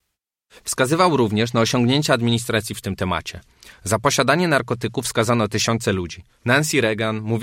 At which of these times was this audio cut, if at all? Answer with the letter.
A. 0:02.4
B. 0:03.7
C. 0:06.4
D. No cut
C